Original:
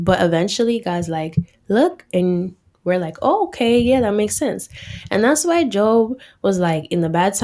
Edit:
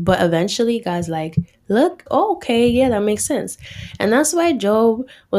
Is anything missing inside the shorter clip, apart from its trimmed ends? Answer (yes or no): yes